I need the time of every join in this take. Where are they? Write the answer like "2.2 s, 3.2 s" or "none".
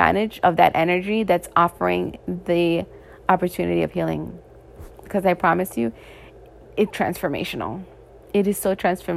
6.9 s